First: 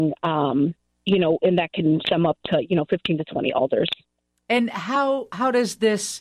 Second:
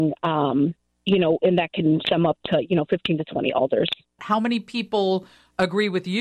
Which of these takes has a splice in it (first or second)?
second